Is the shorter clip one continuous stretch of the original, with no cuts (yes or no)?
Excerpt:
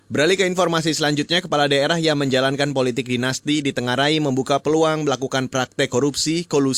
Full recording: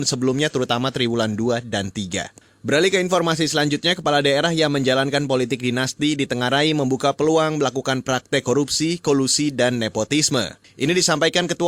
yes